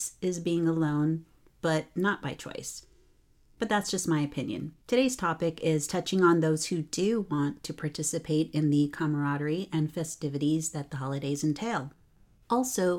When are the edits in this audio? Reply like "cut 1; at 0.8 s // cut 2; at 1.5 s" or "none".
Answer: cut 1; at 4.8 s